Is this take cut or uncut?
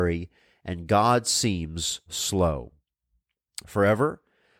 cut